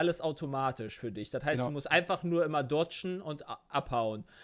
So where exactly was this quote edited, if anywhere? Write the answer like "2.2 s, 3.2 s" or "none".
none